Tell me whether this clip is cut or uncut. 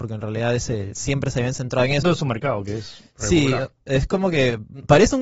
cut